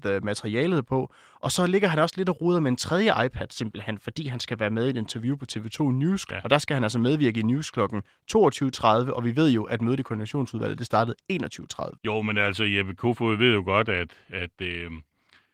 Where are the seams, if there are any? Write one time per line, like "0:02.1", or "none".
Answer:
0:06.3
0:12.0